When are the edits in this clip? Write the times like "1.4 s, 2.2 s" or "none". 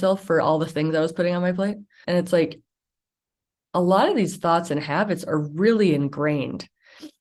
2.0 s